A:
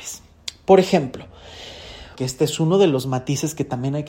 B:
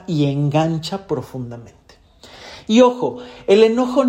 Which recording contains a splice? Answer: A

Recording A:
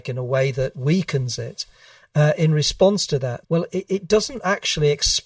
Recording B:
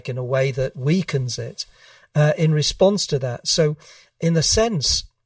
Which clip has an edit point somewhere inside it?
A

